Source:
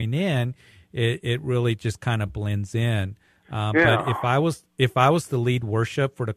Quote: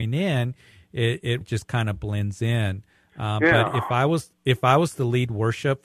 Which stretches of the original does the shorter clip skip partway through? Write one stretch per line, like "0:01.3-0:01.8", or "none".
0:01.4-0:01.7